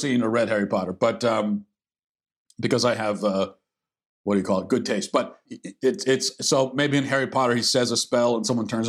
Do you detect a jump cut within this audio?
yes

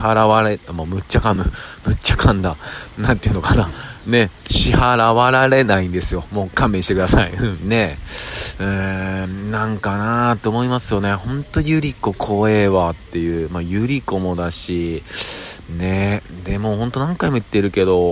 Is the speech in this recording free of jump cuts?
yes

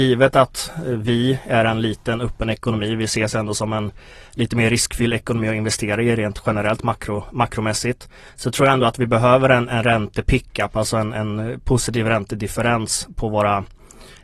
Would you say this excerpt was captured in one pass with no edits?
yes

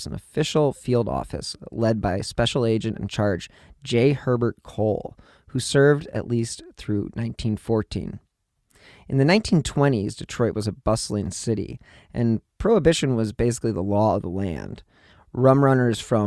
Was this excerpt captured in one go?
yes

